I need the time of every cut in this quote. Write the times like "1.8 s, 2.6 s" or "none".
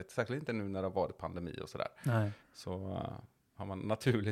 none

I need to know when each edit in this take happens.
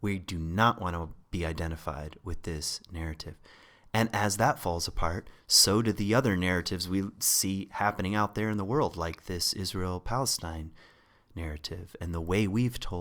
none

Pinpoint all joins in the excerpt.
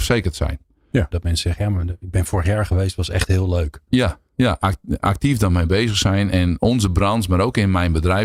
1.1 s, 6.6 s

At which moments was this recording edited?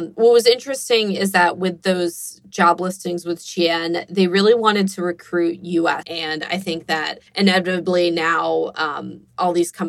6.0 s, 7.3 s

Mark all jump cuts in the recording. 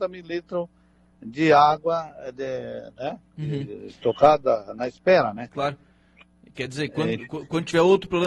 none

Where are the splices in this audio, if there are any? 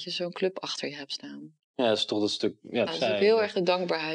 1.7 s, 2.9 s

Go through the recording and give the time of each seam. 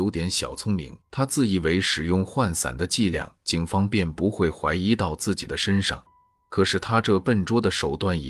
1.0 s

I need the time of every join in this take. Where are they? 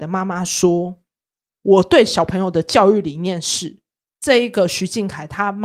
4.1 s

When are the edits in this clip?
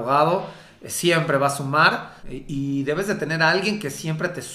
2.2 s

